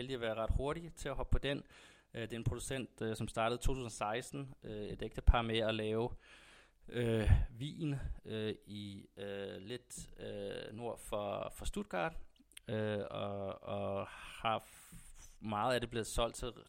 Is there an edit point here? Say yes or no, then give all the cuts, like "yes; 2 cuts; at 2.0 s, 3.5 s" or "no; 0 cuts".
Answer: no; 0 cuts